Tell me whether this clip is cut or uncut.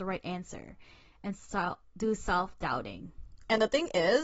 uncut